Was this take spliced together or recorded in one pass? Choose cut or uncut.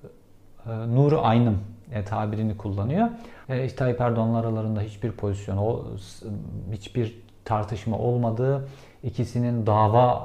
cut